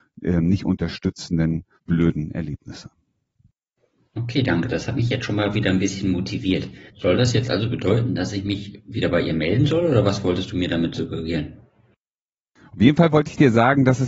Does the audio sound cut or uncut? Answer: cut